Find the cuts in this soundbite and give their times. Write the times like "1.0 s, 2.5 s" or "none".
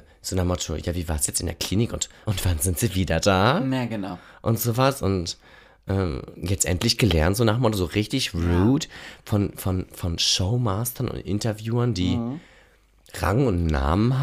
2.2 s